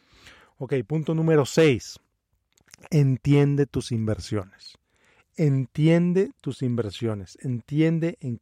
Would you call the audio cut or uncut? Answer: uncut